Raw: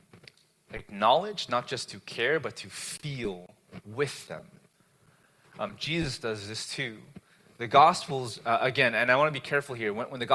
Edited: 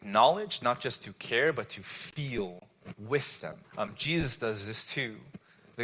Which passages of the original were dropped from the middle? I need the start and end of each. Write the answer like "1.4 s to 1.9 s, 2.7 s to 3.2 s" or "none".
4.5 s to 5.5 s